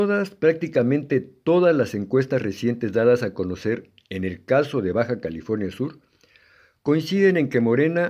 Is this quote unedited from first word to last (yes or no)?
yes